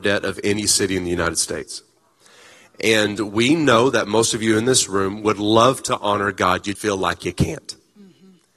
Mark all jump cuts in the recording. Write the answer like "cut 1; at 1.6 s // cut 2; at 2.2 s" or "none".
cut 1; at 6.8 s